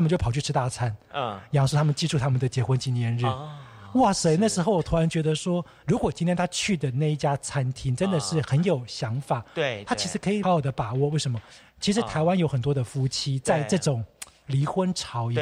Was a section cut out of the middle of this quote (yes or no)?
yes